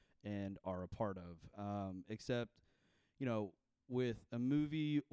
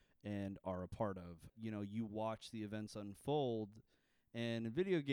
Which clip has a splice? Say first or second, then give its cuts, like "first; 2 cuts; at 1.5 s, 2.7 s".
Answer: second; 1 cut; at 1.5 s